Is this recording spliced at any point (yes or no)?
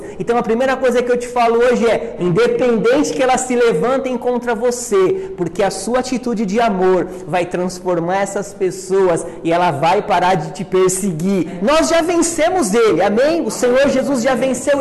yes